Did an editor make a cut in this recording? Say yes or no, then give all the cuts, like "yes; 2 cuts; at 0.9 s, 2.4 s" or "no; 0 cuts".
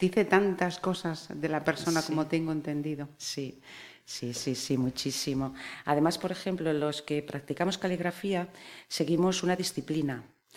no; 0 cuts